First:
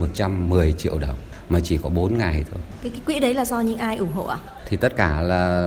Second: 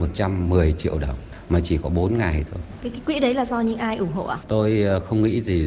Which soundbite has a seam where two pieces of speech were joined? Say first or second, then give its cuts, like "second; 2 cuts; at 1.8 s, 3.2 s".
second; 1 cut; at 4.4 s